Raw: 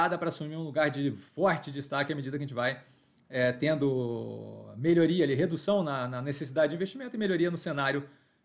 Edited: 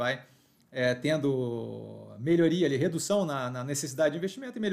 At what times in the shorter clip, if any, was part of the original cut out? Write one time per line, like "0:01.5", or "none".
none